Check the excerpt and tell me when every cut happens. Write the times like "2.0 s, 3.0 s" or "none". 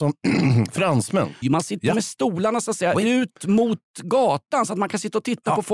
1.4 s